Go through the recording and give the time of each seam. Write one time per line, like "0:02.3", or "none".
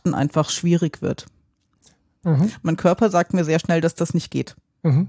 0:02.2